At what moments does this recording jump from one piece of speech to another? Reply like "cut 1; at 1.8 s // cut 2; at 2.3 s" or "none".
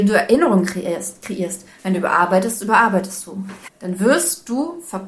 cut 1; at 1.8 s // cut 2; at 3.6 s